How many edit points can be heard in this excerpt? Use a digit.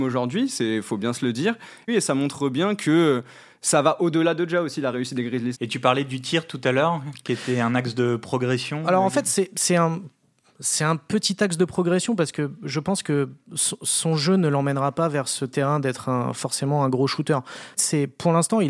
3